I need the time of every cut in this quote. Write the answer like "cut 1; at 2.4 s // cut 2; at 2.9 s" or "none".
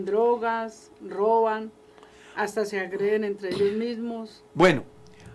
cut 1; at 4.5 s